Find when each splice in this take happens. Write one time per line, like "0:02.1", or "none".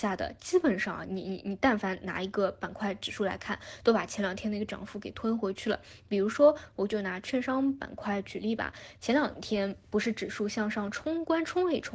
0:01.1